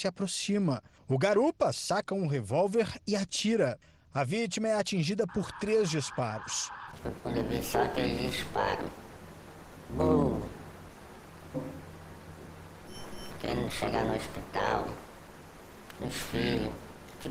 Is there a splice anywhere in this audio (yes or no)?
yes